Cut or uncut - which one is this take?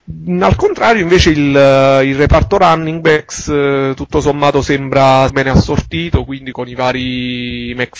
cut